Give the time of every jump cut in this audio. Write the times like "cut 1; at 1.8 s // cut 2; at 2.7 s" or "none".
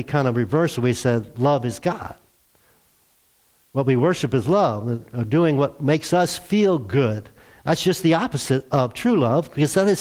cut 1; at 5.0 s

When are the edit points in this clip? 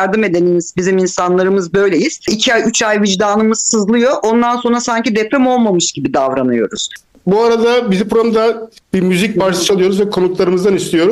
none

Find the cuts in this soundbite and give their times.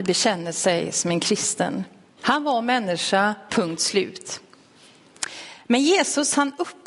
cut 1; at 2.2 s // cut 2; at 3.5 s

